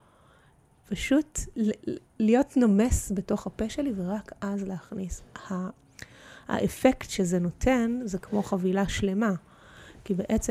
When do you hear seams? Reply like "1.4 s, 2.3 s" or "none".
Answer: 1.5 s